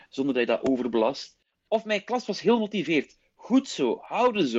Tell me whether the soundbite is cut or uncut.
cut